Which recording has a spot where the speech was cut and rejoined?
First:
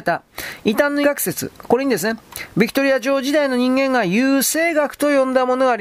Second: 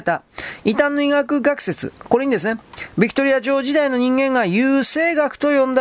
first; 1 cut; at 1.0 s

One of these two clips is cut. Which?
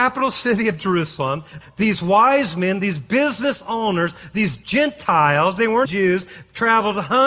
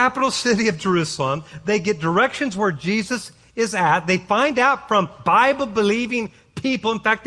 first; 2 cuts; at 1.6 s, 5.8 s

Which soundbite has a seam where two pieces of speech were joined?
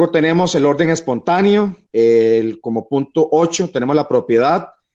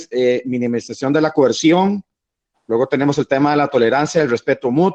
first; 1 cut; at 1.9 s

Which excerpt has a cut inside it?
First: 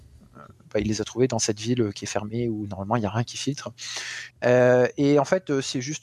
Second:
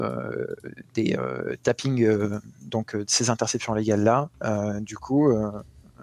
first; 1 cut; at 4.3 s

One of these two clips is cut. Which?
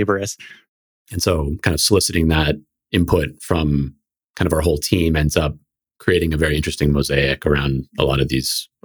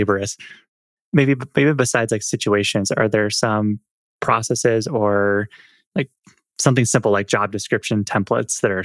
first; 1 cut; at 0.9 s

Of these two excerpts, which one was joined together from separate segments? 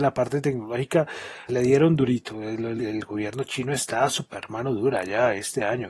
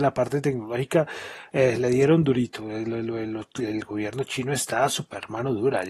first; 2 cuts; at 1.5 s, 2.8 s

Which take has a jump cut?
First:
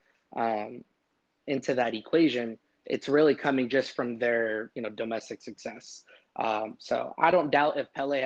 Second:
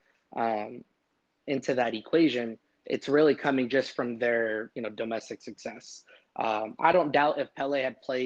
second; 1 cut; at 6.8 s

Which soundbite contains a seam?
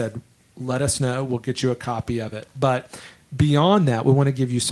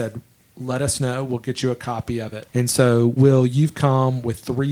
second; 1 cut; at 2.5 s

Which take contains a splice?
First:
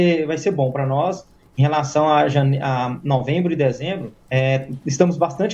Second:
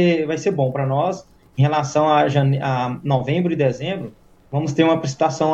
first; 1 cut; at 4.3 s

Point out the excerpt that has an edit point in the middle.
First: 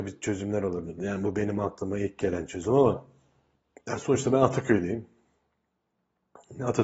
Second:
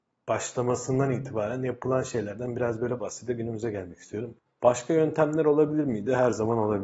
second; 2 cuts; at 3.0 s, 4.5 s

